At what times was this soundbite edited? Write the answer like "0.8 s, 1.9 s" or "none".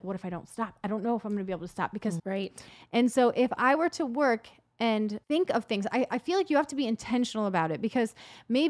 2.2 s, 5.2 s